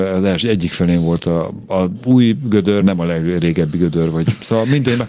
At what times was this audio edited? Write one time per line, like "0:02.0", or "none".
0:02.8